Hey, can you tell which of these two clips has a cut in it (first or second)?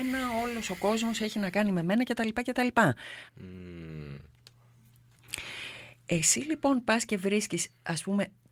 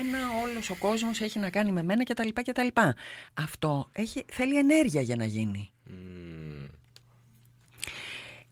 first